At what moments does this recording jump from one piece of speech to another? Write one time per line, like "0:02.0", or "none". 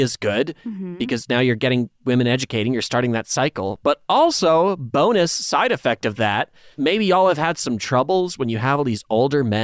0:06.7